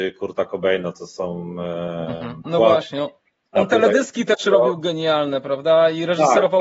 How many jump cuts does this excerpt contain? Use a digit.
1